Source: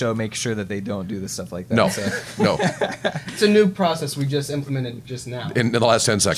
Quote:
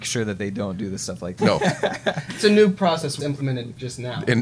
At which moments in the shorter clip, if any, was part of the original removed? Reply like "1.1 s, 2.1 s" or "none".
1.4 s, 3.2 s